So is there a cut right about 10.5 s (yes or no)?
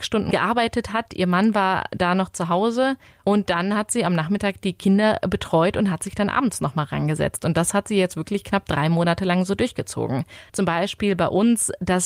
yes